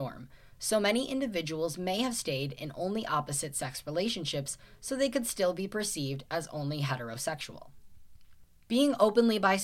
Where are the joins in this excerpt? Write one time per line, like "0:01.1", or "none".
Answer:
none